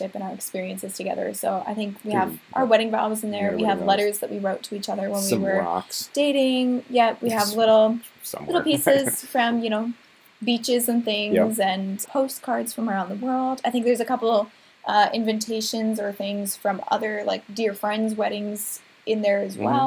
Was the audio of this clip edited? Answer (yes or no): yes